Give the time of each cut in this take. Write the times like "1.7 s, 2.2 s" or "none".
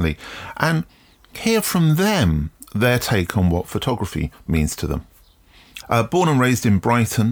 5.8 s